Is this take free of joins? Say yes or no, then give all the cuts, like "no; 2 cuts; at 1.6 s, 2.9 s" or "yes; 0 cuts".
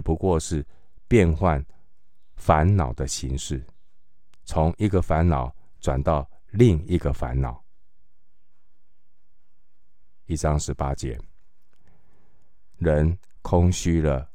no; 2 cuts; at 10.3 s, 12.8 s